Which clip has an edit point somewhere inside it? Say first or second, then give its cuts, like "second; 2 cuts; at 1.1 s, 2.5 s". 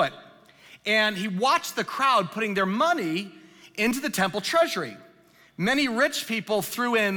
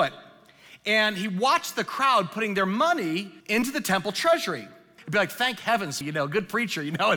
second; 3 cuts; at 3.4 s, 5.0 s, 6.0 s